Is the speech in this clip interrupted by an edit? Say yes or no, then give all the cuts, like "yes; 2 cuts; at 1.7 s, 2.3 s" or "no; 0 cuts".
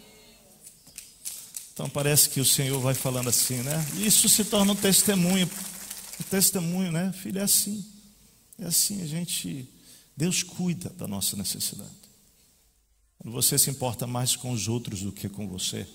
no; 0 cuts